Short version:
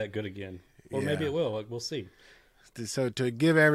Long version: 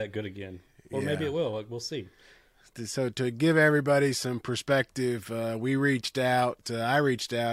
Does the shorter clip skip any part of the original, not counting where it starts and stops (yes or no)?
no